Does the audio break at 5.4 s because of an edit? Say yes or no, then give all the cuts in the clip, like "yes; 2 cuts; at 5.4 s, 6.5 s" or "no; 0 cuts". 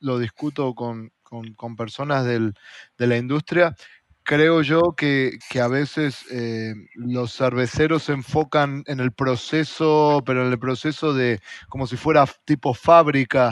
yes; 1 cut; at 5.4 s